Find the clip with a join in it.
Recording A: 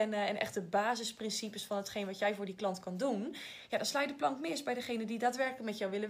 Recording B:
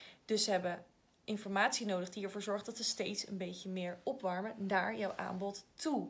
B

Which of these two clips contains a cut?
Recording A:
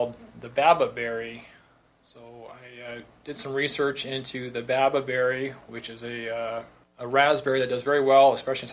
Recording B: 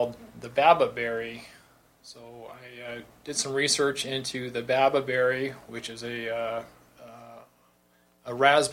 A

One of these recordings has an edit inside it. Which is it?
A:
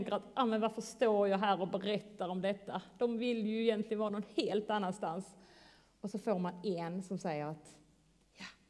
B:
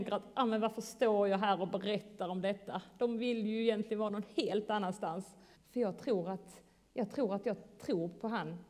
B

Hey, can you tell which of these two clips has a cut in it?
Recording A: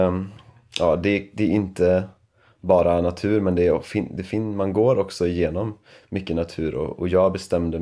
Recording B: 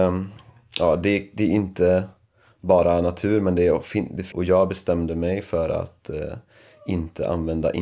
B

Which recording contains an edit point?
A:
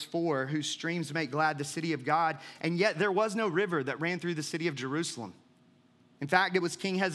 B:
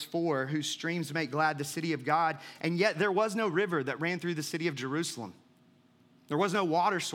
A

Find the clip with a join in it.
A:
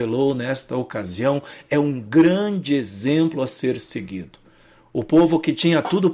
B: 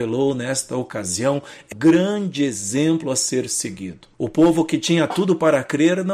B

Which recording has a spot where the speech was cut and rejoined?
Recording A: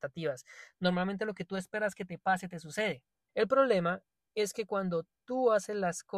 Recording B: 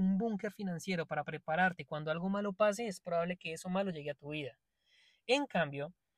A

